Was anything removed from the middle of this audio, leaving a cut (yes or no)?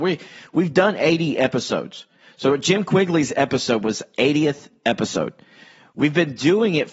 no